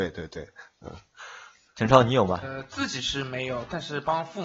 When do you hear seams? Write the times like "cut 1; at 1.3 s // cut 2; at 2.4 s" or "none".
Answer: cut 1; at 2.4 s